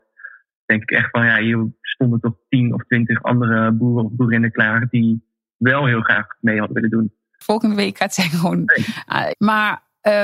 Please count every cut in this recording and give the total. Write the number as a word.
two